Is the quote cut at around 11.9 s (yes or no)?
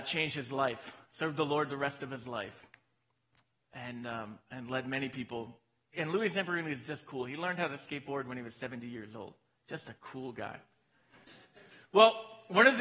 no